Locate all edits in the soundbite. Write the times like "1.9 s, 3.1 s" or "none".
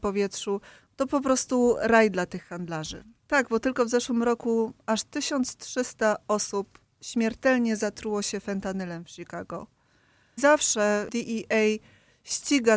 3.2 s, 10.4 s